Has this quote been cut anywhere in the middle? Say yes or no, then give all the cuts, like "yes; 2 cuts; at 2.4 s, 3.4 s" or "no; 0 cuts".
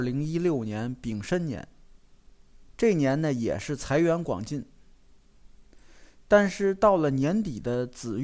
yes; 1 cut; at 2.7 s